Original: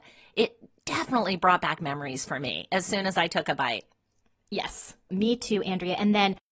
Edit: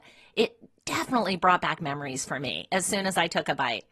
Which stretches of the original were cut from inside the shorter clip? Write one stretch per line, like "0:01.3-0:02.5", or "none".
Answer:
none